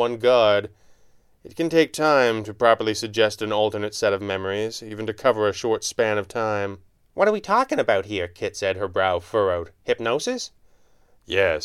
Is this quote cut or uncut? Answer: uncut